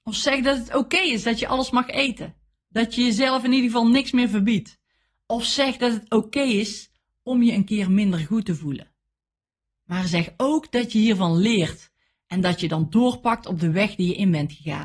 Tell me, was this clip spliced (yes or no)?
no